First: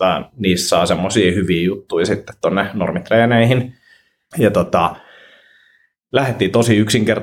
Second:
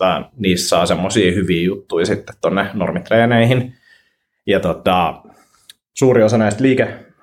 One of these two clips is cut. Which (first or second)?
first